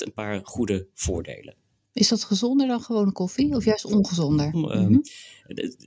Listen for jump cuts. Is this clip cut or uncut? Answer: cut